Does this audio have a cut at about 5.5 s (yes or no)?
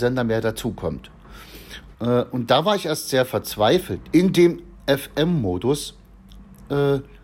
no